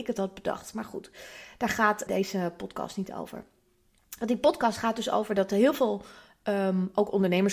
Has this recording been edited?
yes; 1 cut; at 2.1 s

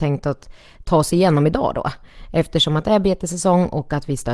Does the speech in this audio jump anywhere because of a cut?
no; 0 cuts

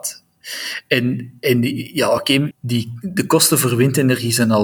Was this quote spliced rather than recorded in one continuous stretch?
yes; 1 cut; at 2.5 s

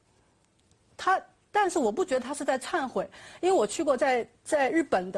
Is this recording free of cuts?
yes; 0 cuts

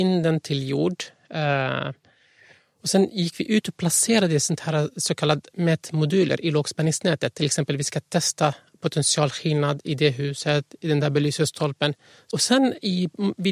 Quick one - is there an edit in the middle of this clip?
no; 0 cuts

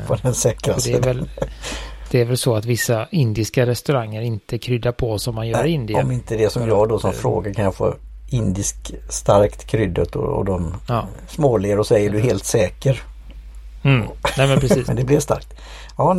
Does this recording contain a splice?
yes; 1 cut; at 14.9 s

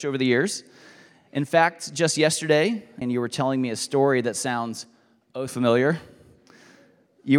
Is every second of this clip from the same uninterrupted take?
no; 2 cuts; at 3.0 s, 5.5 s

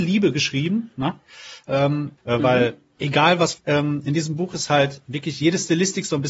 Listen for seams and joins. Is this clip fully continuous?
no; 2 cuts; at 2.2 s, 3.6 s

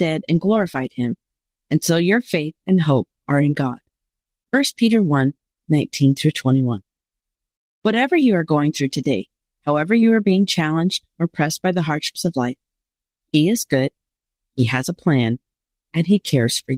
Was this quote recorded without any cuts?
yes; 0 cuts

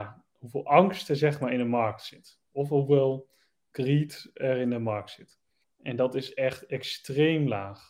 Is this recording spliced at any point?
yes; 1 cut; at 5.6 s

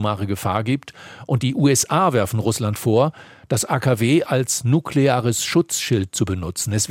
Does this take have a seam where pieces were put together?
no; 0 cuts

